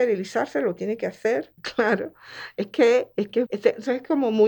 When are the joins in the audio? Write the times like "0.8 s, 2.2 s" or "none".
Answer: 1.6 s, 3.5 s